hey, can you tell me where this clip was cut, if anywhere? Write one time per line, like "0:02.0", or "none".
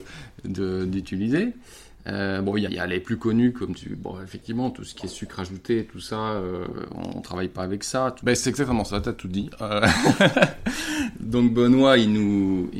0:02.7
0:08.2